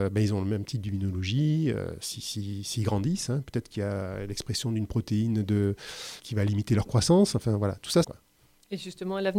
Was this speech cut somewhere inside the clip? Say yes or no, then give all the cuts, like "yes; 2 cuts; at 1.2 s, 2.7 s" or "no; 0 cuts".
yes; 2 cuts; at 6.2 s, 8.0 s